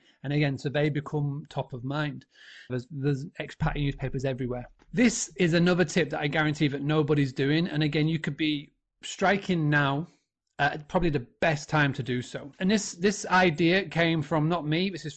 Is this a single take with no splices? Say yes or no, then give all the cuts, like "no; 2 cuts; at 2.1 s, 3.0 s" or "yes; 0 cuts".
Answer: no; 1 cut; at 2.7 s